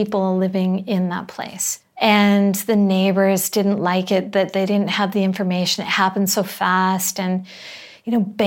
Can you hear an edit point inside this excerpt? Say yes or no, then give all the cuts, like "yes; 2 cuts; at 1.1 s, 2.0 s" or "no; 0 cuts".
no; 0 cuts